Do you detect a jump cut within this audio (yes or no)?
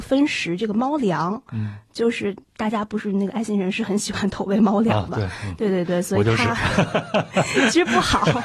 no